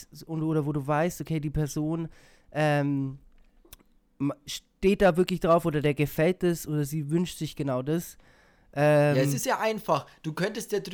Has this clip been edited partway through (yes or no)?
no